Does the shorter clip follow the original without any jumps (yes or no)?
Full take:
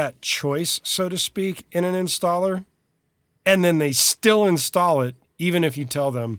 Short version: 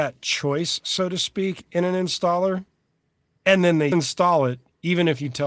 no